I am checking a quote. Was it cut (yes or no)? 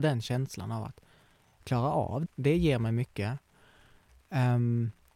yes